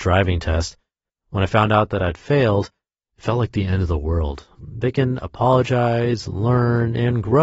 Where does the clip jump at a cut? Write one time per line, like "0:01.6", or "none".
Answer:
0:01.1
0:04.6